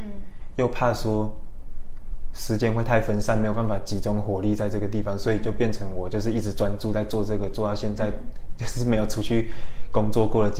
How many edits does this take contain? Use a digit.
0